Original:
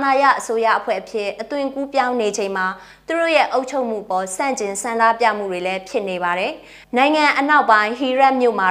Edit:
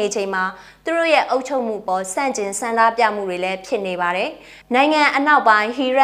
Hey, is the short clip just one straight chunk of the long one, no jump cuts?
yes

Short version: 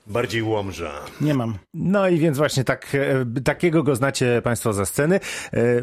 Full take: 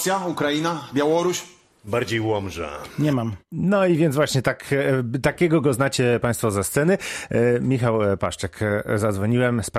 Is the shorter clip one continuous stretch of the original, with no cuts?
yes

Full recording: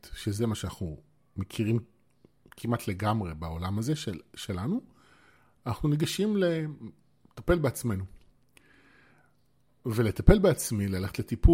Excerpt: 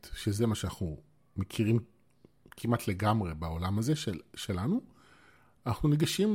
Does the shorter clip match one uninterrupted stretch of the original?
yes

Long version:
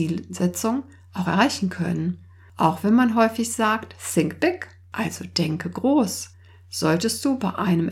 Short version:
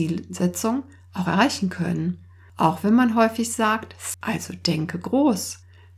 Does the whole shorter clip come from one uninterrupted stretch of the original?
no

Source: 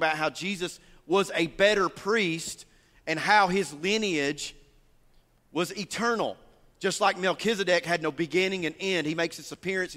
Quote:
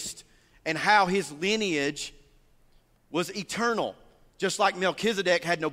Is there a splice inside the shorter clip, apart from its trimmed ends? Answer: no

